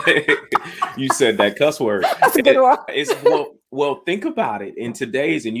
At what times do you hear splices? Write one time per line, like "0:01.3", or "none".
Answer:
0:02.9